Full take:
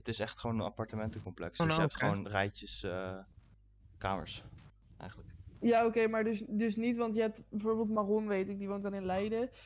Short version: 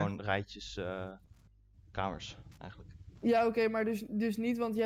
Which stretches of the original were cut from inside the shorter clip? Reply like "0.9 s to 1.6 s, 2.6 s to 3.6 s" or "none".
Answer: 4.6 s to 5.0 s